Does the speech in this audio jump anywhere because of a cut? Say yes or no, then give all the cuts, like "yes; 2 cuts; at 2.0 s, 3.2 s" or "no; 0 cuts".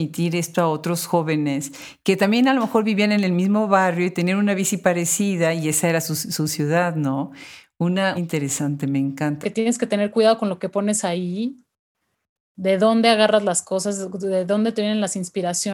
yes; 2 cuts; at 8.2 s, 9.4 s